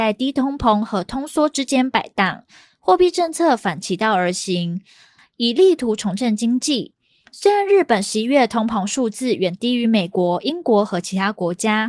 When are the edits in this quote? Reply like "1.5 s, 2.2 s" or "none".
5.2 s

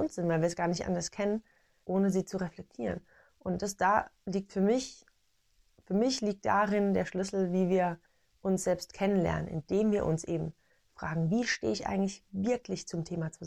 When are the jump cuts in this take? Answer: 1.8 s

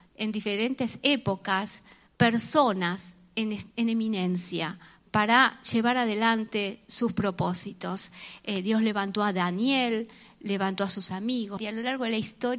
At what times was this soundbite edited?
11.6 s

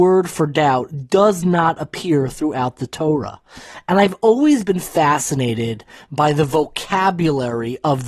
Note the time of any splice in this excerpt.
none

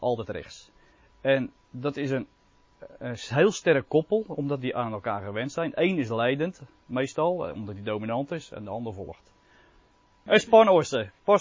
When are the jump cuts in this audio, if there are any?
10.3 s

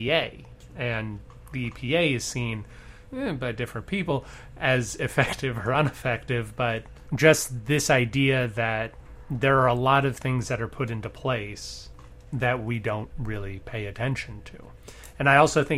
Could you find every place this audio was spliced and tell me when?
none

